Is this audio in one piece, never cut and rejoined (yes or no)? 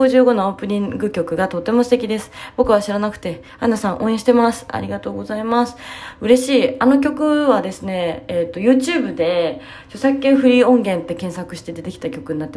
yes